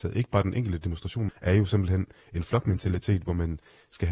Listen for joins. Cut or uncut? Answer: cut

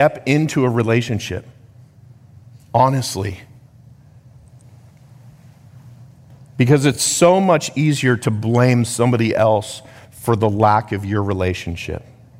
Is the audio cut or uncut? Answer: uncut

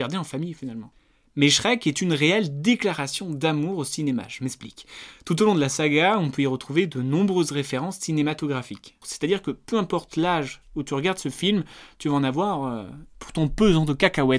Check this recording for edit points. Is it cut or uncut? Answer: cut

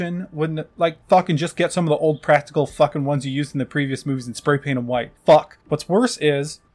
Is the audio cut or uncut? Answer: uncut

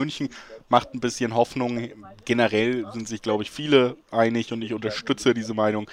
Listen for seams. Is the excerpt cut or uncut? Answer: uncut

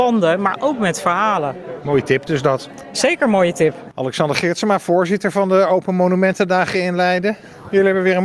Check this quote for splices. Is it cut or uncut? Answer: uncut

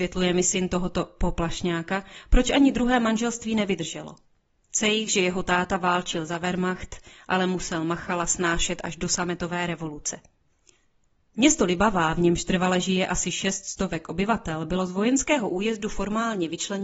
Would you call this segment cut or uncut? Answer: uncut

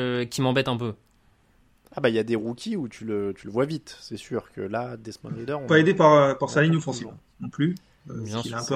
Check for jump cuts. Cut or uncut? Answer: uncut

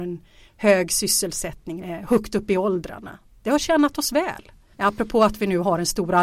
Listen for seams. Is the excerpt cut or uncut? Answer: cut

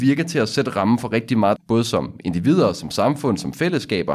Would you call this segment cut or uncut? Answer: cut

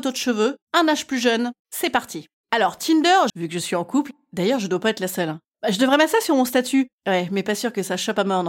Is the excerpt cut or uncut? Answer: cut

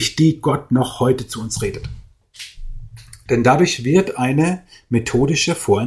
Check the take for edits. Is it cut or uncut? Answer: cut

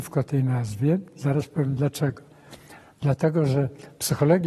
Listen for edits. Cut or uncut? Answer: uncut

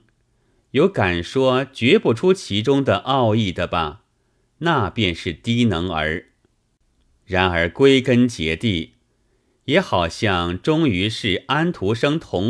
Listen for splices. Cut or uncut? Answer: uncut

